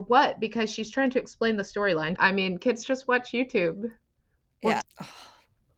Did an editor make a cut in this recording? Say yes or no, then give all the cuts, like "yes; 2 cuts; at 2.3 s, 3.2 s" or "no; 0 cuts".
yes; 2 cuts; at 2.2 s, 4.8 s